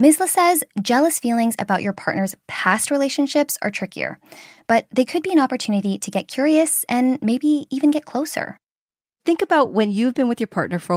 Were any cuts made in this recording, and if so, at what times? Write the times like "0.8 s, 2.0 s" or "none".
none